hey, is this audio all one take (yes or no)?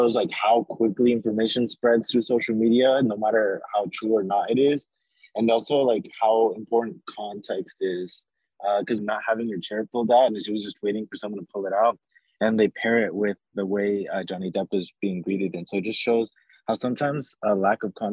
no